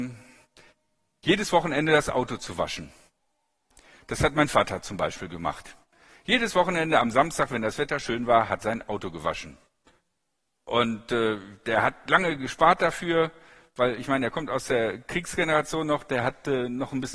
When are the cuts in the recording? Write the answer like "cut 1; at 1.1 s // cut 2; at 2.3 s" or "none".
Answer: cut 1; at 8.6 s